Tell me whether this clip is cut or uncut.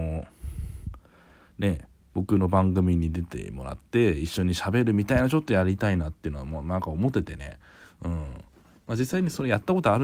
uncut